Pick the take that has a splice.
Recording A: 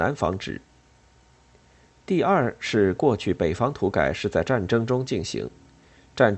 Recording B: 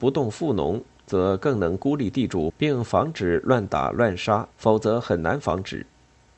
B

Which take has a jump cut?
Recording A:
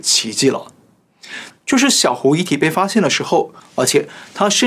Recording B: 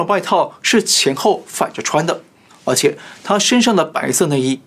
A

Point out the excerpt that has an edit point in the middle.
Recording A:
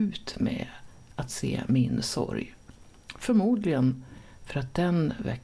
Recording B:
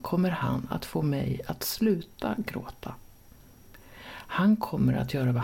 A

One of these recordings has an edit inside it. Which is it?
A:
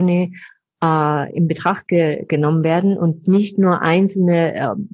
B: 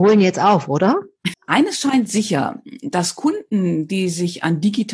B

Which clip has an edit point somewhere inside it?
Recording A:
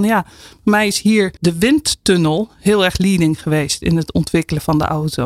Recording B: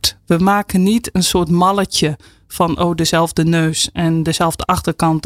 A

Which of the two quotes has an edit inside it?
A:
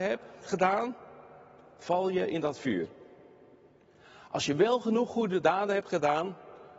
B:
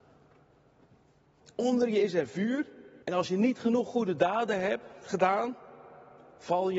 B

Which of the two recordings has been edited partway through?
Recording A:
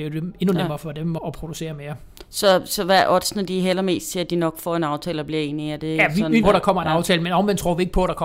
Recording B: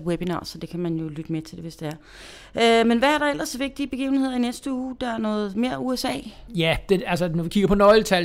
A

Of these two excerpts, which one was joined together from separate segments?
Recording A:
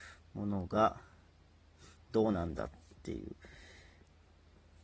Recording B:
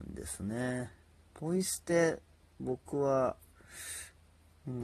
B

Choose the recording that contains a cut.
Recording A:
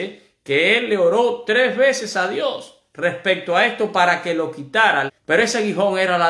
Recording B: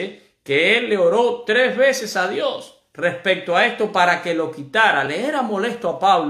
A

